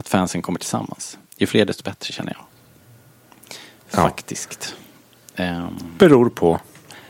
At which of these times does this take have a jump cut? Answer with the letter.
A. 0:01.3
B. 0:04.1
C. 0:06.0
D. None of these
A